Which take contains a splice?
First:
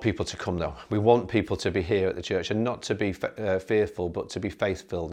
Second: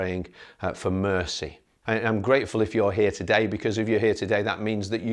second; 1 cut; at 1.8 s

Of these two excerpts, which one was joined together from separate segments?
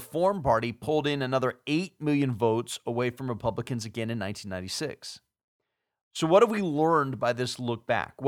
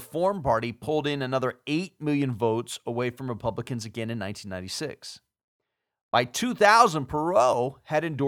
first; 1 cut; at 6.0 s

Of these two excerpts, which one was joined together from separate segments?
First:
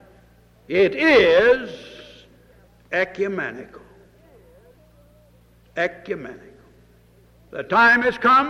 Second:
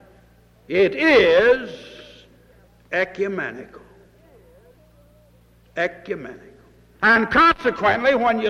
second; 1 cut; at 7.0 s

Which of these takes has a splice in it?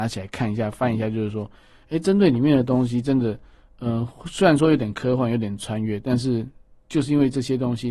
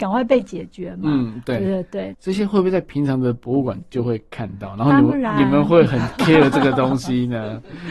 second; 1 cut; at 2.1 s

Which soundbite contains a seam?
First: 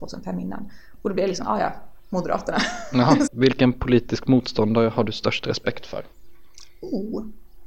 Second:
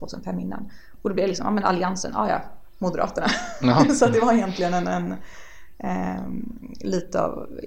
first; 2 cuts; at 1.4 s, 3.3 s

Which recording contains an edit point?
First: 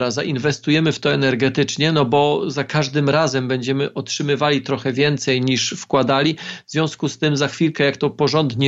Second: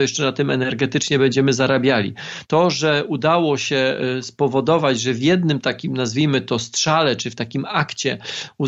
second; 1 cut; at 2.4 s

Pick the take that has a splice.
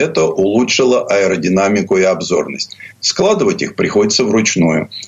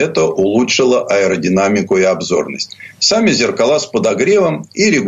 first; 1 cut; at 2.9 s

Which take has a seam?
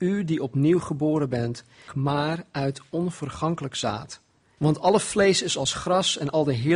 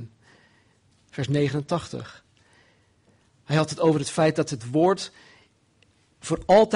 first; 2 cuts; at 1.9 s, 4.6 s

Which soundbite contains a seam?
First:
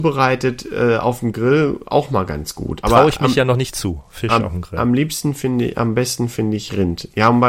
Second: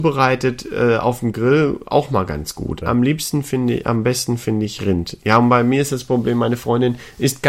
second; 1 cut; at 2.8 s

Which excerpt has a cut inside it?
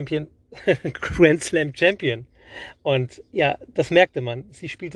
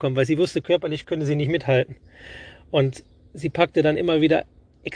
first; 1 cut; at 3.3 s

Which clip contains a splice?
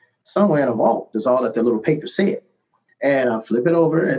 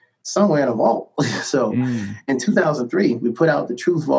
first; 1 cut; at 1.1 s

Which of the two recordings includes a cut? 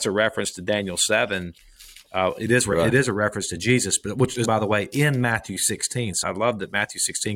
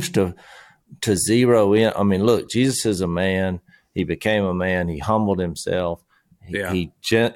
first; 2 cuts; at 4.4 s, 6.2 s

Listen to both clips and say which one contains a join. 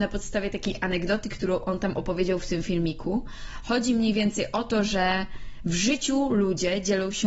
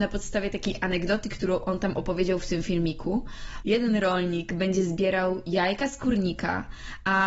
second; 1 cut; at 3.6 s

